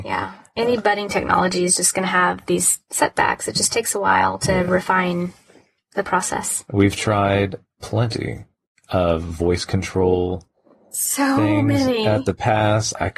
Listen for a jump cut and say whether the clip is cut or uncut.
uncut